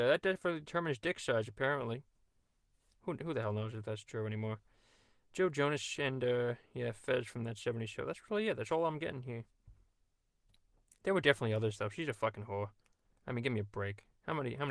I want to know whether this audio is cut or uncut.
uncut